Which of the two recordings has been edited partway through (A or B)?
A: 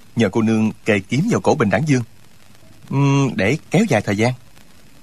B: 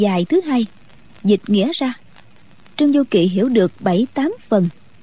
A